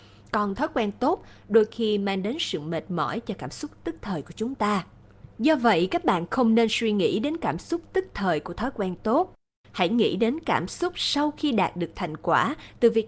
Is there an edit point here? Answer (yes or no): no